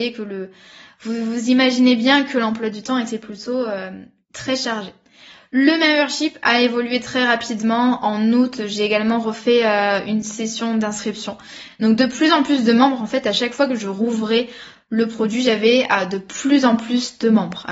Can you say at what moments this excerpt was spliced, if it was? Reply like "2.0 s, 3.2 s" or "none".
none